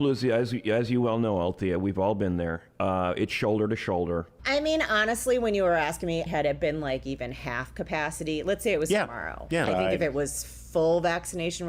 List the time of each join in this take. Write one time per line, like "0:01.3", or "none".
0:04.4
0:06.3
0:09.7